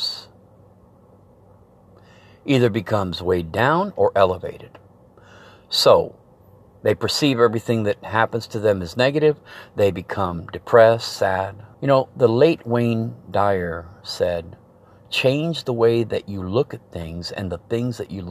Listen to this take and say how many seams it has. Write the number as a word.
one